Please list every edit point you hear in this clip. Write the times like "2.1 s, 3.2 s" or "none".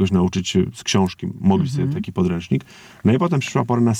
none